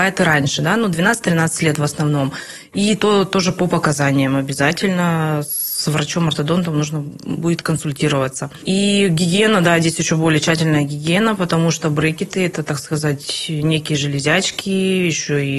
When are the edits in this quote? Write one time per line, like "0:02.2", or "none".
none